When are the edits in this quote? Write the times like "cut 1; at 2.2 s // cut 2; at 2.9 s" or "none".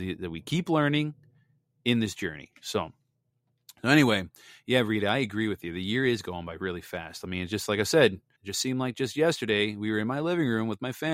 cut 1; at 8.4 s